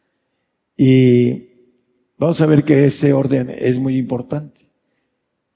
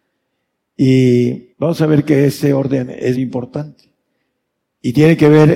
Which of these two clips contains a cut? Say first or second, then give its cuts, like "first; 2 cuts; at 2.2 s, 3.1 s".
second; 2 cuts; at 1.5 s, 3.2 s